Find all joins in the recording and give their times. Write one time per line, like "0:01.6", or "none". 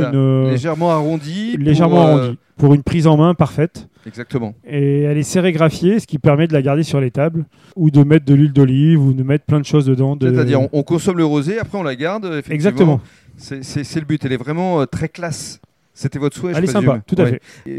none